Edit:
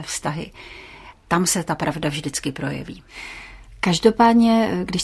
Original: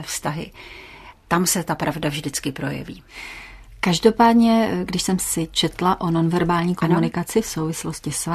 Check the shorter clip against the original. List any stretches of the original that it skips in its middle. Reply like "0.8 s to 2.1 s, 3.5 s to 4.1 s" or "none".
none